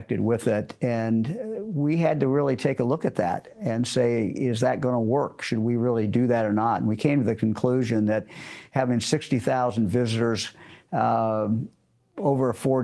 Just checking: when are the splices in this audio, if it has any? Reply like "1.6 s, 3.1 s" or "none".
none